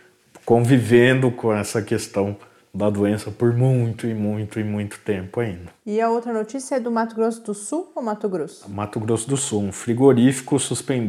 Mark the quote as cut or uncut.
uncut